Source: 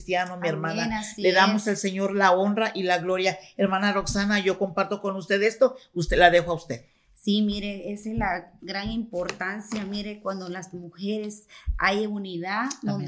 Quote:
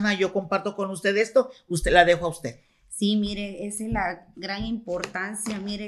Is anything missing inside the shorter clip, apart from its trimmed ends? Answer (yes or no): no